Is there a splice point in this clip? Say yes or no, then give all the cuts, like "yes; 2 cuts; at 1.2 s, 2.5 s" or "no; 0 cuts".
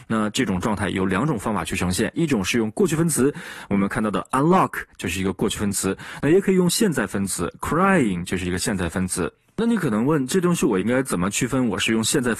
no; 0 cuts